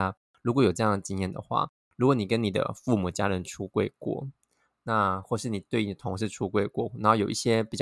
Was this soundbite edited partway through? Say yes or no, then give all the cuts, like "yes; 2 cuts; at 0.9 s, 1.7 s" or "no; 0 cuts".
no; 0 cuts